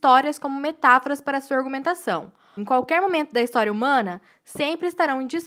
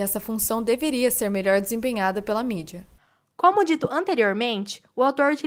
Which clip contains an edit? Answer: first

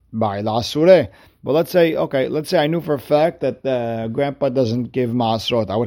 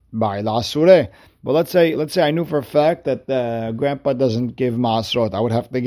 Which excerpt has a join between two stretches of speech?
second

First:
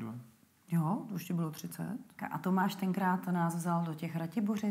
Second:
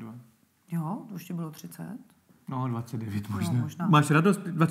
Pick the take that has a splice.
first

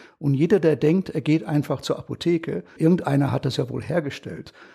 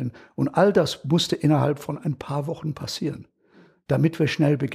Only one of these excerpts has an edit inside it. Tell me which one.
first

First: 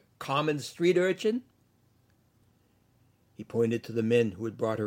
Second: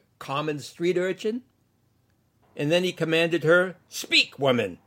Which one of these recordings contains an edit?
second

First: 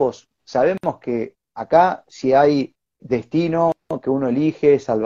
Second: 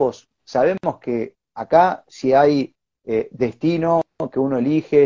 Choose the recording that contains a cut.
first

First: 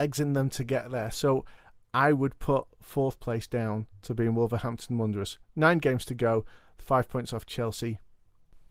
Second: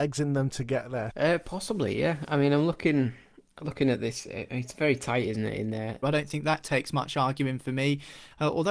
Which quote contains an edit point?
second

